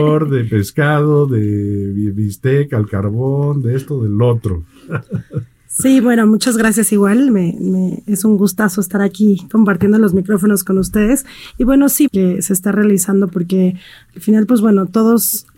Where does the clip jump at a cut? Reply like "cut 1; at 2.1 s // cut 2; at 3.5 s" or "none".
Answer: cut 1; at 12.1 s